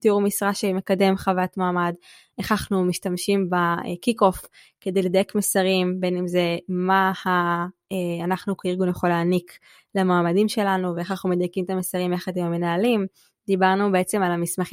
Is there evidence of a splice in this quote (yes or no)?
no